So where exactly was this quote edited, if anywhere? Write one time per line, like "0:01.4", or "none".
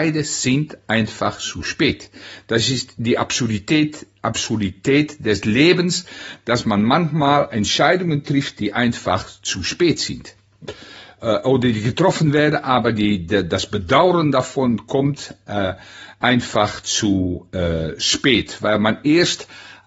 none